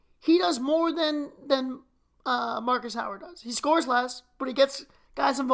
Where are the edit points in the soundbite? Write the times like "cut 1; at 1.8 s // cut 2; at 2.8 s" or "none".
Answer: none